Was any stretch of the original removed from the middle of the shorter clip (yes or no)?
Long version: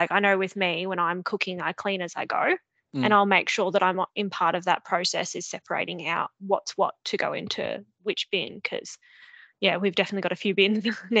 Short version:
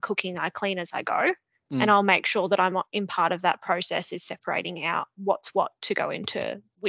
no